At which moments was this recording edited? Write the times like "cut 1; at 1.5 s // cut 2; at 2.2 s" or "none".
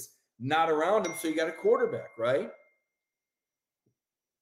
none